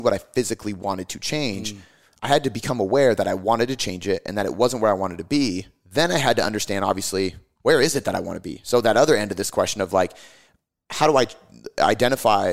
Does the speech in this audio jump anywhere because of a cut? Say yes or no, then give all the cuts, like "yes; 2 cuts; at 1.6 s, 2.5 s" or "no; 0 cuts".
no; 0 cuts